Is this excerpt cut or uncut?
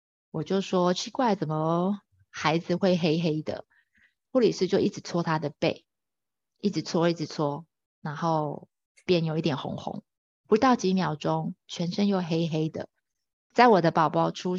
cut